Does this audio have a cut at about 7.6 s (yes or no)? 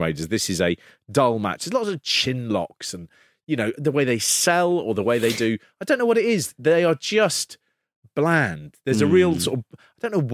no